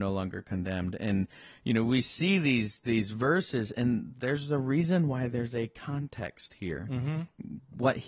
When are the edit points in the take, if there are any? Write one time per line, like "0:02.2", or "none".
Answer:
none